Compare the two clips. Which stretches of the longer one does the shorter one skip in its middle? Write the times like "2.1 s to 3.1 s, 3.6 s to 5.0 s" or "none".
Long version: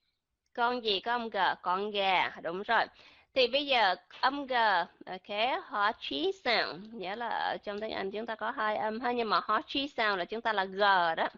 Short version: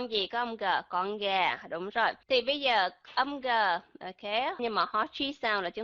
3.0 s to 3.3 s, 5.6 s to 9.1 s